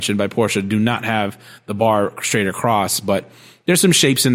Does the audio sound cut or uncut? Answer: uncut